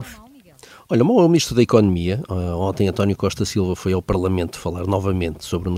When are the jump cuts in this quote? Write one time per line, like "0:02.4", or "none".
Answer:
none